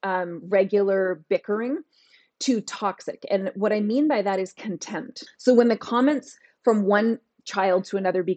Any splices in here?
yes; 1 cut; at 5.3 s

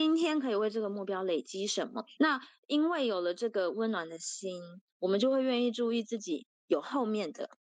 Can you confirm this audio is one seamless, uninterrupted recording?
no; 1 cut; at 2.2 s

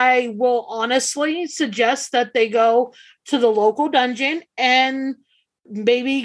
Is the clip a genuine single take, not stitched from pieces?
yes; 0 cuts

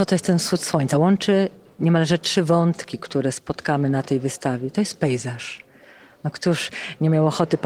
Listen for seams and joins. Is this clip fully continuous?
yes; 0 cuts

